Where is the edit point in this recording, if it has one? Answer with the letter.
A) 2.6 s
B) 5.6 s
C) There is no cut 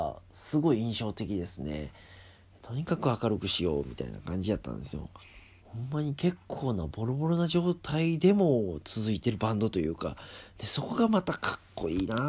B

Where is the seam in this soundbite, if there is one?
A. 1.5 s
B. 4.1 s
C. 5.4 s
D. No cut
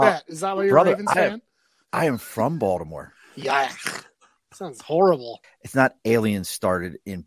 C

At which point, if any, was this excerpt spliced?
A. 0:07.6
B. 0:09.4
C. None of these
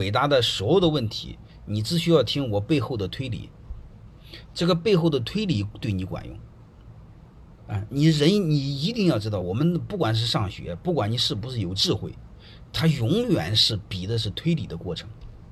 C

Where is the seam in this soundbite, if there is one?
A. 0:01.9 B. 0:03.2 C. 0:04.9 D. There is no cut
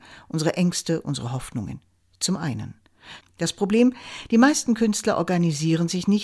B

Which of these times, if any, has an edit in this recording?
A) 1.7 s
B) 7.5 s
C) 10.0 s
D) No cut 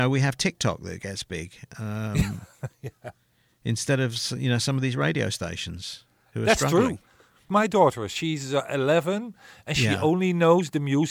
B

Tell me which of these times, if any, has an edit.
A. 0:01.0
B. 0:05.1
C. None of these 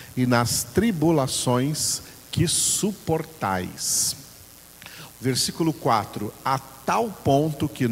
B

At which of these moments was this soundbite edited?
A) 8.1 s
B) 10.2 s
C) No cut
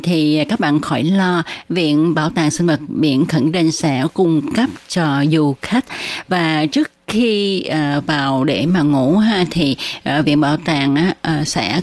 C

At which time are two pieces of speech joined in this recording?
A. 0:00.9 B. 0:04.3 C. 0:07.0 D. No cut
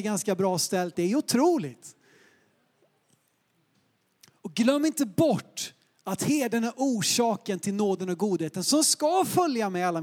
A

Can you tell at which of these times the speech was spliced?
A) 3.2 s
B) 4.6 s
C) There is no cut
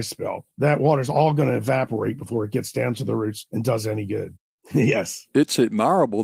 B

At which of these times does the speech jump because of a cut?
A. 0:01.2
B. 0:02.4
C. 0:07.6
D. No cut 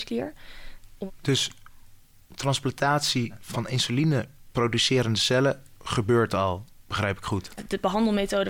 C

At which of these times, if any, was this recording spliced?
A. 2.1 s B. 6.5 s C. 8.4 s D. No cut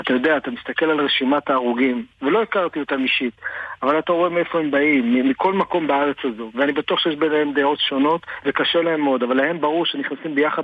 D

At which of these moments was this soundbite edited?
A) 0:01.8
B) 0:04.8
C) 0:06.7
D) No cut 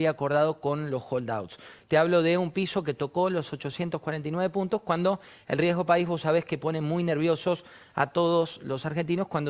D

